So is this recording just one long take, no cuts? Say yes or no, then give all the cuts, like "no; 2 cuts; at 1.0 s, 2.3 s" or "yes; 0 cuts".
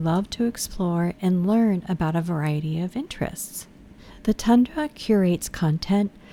yes; 0 cuts